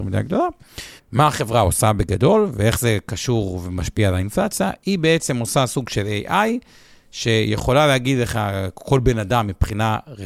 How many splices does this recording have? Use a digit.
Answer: 1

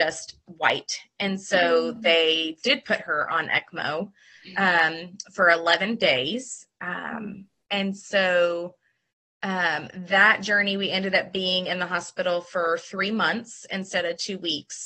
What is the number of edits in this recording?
0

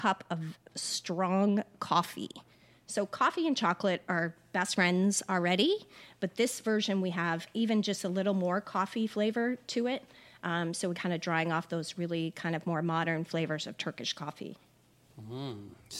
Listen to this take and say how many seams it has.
1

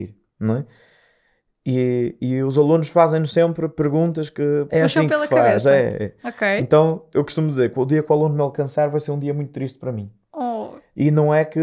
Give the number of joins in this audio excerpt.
1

